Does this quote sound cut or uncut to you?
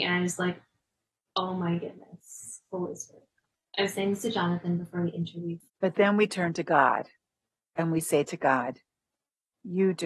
cut